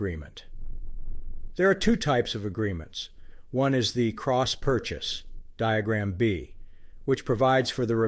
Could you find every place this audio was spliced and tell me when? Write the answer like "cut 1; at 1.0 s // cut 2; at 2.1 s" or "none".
cut 1; at 1.6 s